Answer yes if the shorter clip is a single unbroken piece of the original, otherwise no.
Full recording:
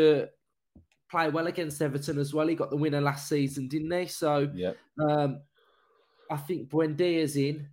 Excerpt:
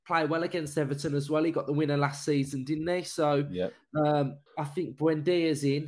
no